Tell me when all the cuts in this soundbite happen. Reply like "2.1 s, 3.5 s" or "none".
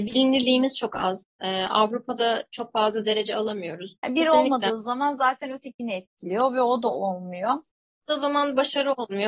4.0 s

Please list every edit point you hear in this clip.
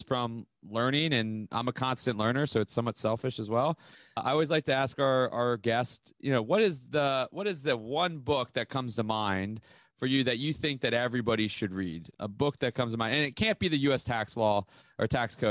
none

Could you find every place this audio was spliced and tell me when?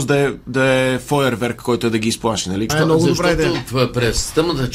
2.7 s

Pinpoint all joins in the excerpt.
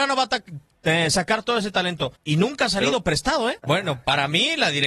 2.2 s, 3.6 s

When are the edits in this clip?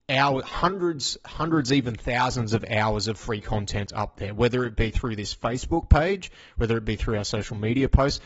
none

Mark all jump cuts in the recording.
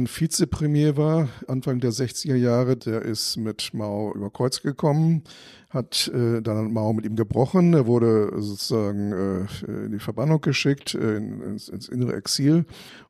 none

